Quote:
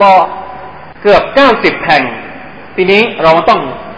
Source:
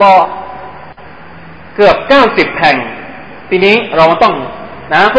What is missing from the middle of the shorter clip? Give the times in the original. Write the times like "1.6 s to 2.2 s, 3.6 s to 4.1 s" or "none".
0.9 s to 1.7 s

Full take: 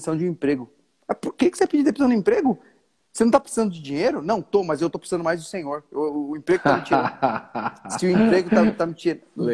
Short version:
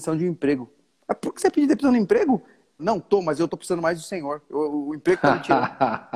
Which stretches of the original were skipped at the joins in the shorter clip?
1.3 s to 1.5 s, 3.0 s to 4.2 s

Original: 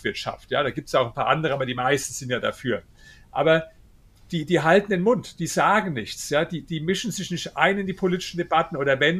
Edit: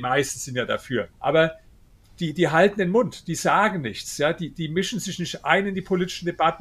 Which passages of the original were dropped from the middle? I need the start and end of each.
2.9 s to 3.2 s

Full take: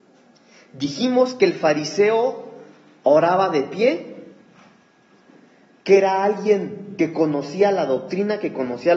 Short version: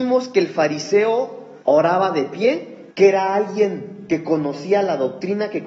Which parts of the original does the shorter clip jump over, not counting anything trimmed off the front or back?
2.7 s to 3.0 s, 4.3 s to 5.8 s

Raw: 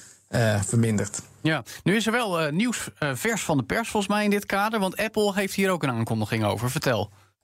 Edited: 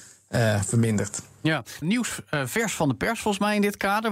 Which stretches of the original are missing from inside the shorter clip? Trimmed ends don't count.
1.8 s to 2.5 s

